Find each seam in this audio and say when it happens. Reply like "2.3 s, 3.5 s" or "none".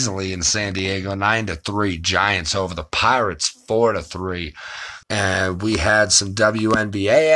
5.0 s